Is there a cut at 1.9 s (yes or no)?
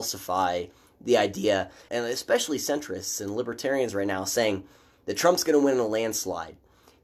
yes